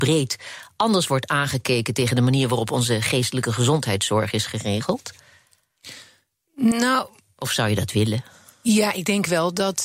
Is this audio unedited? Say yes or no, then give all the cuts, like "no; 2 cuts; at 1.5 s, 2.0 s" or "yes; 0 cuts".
yes; 0 cuts